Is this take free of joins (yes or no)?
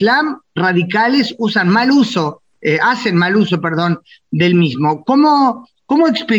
yes